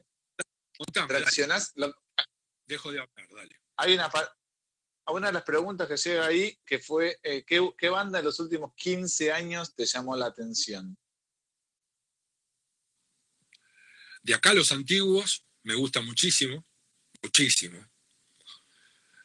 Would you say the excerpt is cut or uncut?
uncut